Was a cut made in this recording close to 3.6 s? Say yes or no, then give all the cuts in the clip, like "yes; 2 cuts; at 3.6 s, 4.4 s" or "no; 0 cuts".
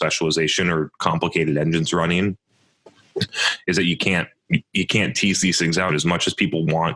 no; 1 cut; at 5.9 s